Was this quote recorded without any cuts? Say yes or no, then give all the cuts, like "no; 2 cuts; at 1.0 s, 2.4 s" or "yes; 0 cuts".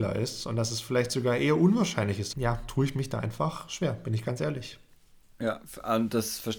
no; 1 cut; at 2.3 s